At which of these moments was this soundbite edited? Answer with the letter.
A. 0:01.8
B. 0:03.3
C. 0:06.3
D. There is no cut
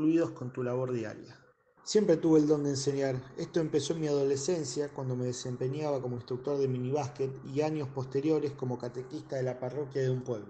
A